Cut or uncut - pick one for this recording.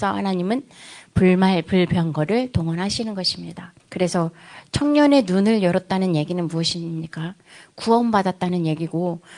cut